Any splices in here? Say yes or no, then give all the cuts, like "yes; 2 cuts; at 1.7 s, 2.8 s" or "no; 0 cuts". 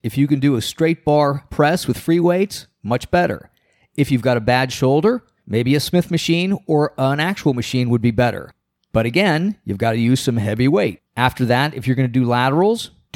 yes; 1 cut; at 11.1 s